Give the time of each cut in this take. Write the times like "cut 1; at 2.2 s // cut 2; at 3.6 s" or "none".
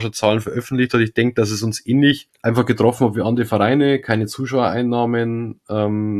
cut 1; at 2.3 s

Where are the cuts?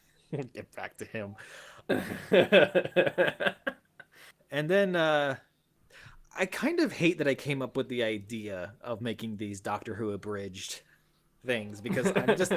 none

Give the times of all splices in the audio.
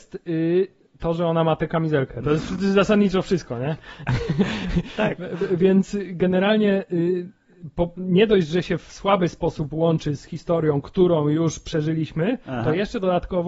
none

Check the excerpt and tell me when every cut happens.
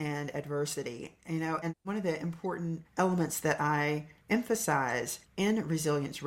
cut 1; at 1.6 s

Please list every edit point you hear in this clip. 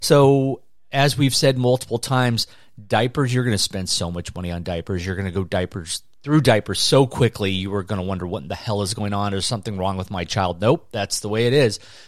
none

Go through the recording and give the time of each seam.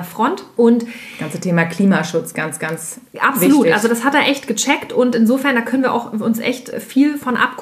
none

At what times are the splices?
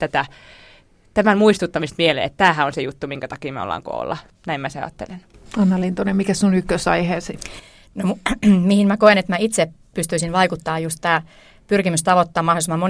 cut 1; at 4.3 s

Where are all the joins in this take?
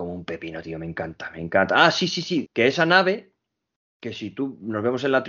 cut 1; at 2.5 s

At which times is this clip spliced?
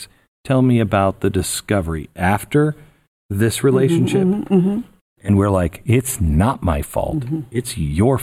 cut 1; at 5.2 s

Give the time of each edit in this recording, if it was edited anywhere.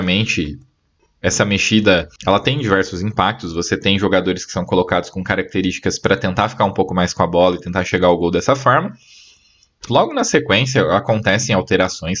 cut 1; at 2.2 s // cut 2; at 9.9 s

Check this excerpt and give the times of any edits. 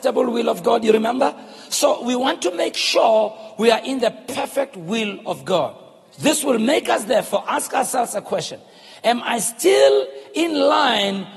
none

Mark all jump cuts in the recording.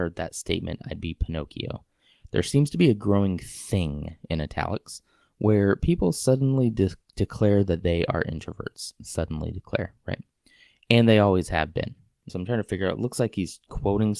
cut 1; at 12.3 s

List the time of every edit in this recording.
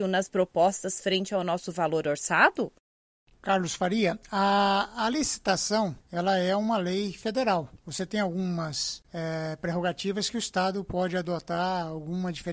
none

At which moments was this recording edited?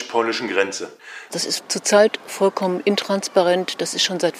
cut 1; at 1.3 s

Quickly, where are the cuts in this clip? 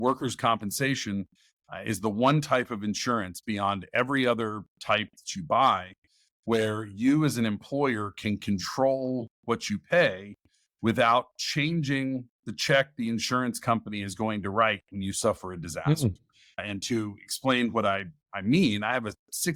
none

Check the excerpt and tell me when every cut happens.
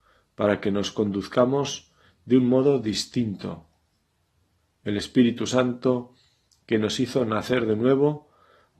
none

